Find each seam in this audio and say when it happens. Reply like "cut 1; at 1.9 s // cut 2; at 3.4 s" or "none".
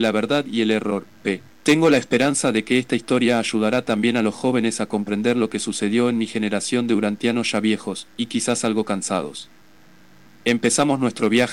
cut 1; at 1.5 s